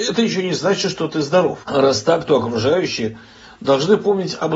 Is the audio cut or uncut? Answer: cut